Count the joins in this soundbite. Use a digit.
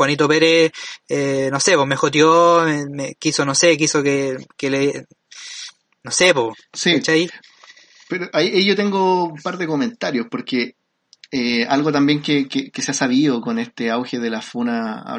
0